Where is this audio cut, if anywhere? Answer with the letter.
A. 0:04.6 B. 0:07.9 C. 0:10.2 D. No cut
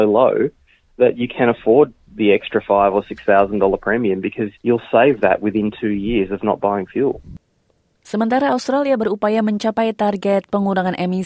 A